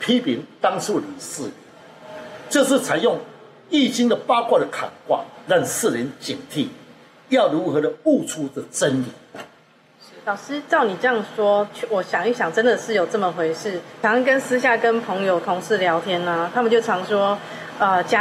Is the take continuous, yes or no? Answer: no